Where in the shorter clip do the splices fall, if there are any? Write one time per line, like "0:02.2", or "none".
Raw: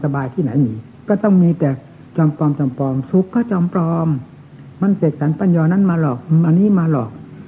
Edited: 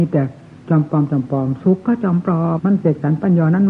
0:02.6